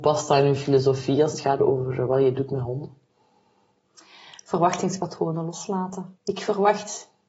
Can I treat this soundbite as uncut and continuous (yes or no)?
no